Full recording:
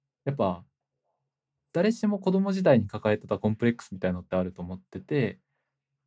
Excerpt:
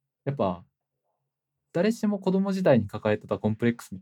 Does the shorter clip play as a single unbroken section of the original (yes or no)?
yes